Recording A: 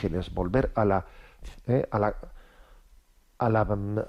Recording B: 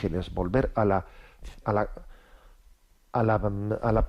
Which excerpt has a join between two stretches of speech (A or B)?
B